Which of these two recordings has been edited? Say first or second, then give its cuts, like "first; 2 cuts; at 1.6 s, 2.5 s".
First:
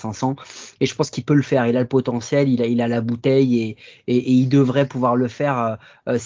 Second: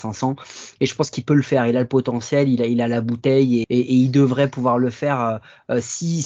second; 1 cut; at 3.6 s